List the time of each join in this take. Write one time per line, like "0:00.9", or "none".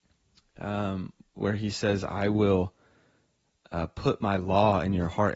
none